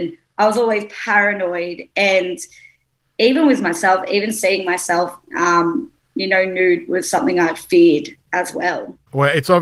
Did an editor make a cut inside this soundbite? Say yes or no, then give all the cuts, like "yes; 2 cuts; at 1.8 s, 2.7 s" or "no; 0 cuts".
no; 0 cuts